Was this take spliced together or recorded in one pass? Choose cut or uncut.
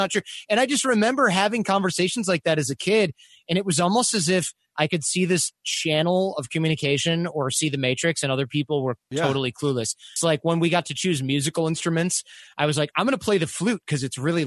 cut